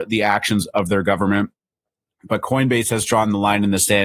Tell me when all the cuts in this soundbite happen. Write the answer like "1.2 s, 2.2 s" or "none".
2.3 s